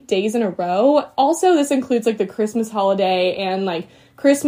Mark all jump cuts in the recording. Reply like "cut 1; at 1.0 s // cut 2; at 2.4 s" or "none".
none